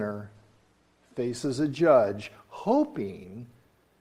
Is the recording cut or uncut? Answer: uncut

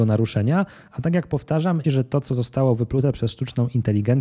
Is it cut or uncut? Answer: cut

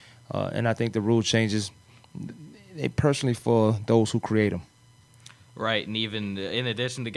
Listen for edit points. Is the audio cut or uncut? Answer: uncut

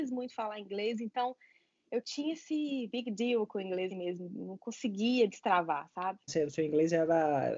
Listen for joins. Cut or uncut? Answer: cut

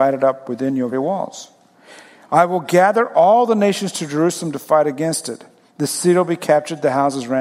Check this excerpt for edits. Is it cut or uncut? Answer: cut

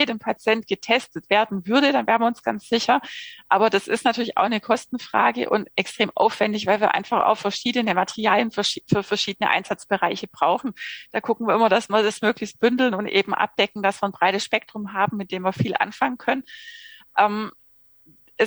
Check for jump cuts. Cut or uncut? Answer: uncut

